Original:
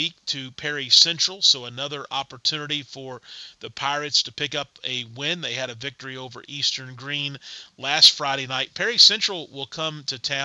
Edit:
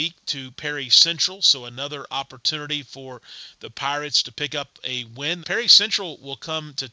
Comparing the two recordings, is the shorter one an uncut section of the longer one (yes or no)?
no